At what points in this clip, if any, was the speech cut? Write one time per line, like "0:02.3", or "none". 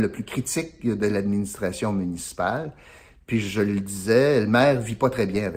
none